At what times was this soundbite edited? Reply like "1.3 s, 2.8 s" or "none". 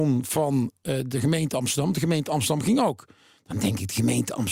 none

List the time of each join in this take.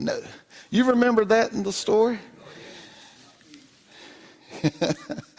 none

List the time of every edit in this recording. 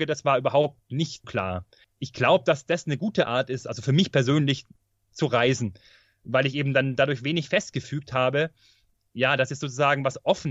1.2 s

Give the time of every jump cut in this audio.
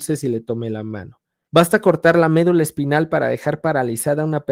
1.5 s

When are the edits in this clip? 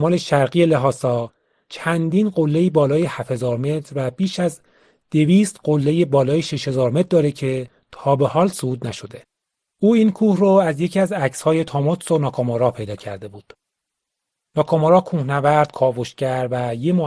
9.6 s

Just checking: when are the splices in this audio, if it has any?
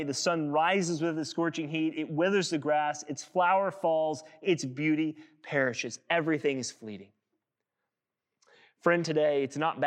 none

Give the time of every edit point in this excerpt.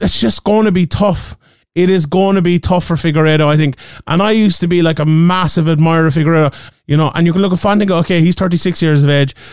6.7 s

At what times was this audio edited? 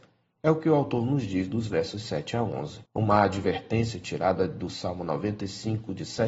2.9 s

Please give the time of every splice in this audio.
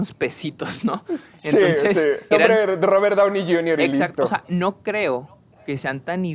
2.3 s

